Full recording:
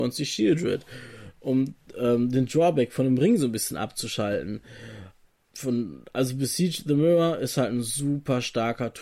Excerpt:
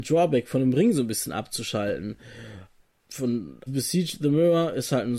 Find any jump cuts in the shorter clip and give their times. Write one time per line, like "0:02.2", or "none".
0:03.7